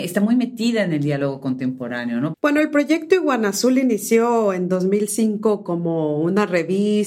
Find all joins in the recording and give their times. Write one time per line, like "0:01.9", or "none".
0:02.3